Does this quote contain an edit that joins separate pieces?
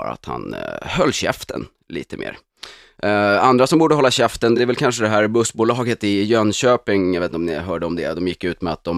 no; 0 cuts

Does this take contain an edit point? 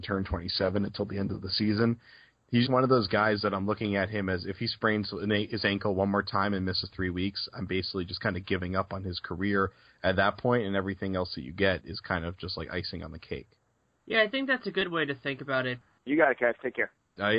yes; 2 cuts; at 2.7 s, 16.0 s

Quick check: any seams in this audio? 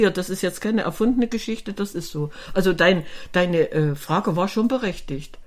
no; 0 cuts

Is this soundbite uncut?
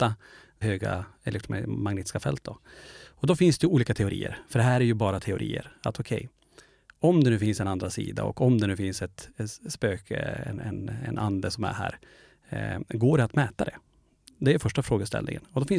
yes; 0 cuts

